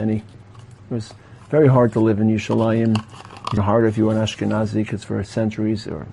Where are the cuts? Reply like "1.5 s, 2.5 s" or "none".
3.6 s